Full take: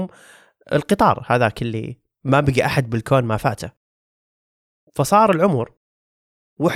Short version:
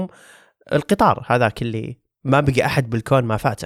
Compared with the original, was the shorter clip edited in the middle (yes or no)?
no